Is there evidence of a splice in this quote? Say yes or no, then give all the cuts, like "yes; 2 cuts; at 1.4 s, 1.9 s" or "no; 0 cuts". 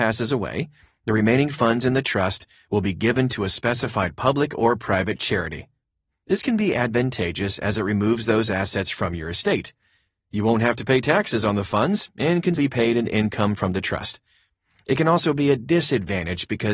yes; 2 cuts; at 6.1 s, 12.6 s